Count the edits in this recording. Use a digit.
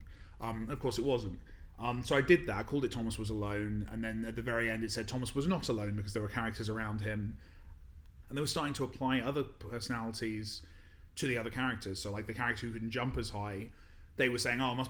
1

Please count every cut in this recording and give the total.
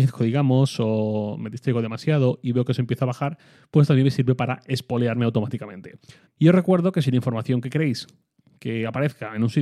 1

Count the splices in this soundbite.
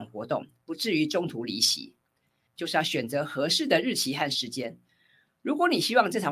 1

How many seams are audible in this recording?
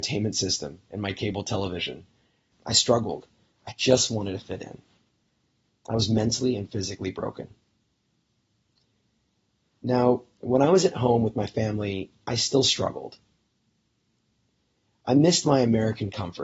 1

